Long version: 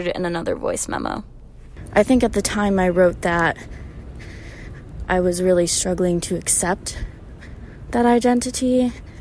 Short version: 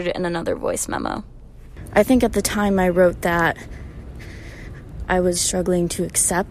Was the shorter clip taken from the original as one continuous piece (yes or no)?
no